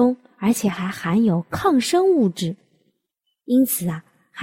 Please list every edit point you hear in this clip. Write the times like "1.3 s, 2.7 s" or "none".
none

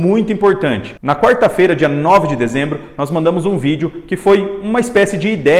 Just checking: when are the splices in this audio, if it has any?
1.0 s

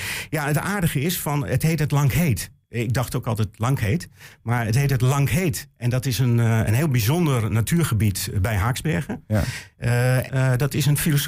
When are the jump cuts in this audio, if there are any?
10.3 s

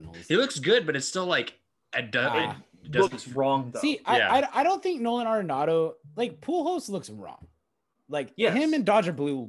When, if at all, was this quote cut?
none

